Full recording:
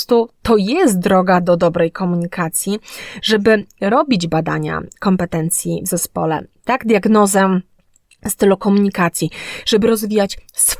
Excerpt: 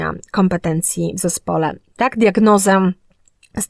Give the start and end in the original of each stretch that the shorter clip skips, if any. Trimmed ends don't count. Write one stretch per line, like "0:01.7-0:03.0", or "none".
none

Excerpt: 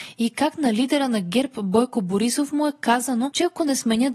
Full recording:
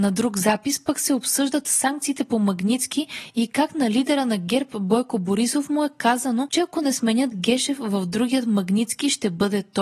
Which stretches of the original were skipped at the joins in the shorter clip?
none

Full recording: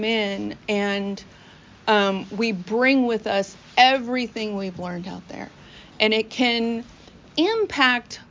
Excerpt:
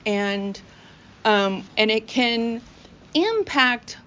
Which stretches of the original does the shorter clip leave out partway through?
0:02.3-0:05.9

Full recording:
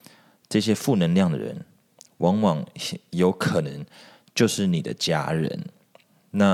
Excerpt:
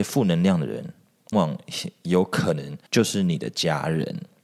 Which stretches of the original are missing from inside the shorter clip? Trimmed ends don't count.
0:02.0-0:02.4
0:03.9-0:04.3

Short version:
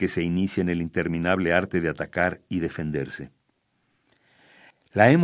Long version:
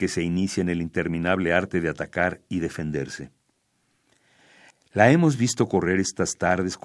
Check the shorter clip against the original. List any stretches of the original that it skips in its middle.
none

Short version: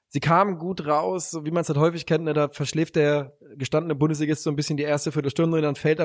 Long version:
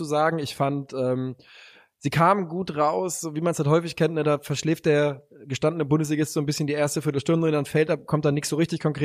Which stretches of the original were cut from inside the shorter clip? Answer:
none

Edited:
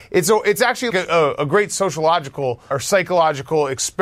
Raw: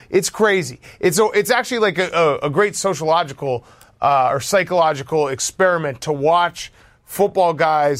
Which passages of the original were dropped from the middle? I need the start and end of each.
0:01.8-0:01.9
0:03.7-0:04.3

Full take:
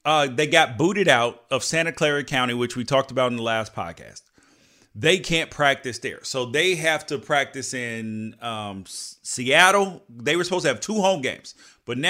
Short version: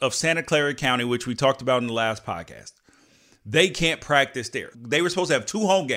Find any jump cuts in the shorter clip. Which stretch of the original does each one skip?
0:06.2-0:10.1

